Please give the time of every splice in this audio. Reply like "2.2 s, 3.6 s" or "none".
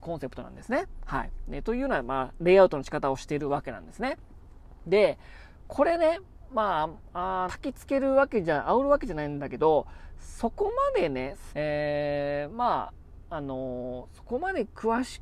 7.5 s, 11.5 s